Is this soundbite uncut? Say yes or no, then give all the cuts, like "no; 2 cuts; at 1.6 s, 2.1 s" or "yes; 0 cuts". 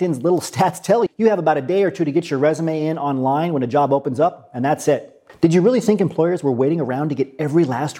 no; 2 cuts; at 1.1 s, 5.3 s